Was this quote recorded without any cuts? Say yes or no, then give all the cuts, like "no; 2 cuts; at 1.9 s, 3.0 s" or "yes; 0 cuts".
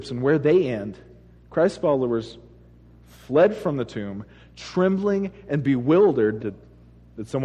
no; 1 cut; at 6.4 s